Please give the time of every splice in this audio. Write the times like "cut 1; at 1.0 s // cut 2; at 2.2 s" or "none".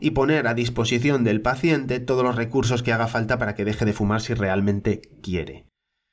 none